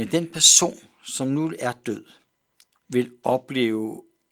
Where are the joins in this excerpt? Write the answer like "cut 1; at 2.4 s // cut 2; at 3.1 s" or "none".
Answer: cut 1; at 2.7 s